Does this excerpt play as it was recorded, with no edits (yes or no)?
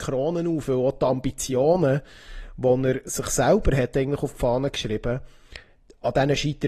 yes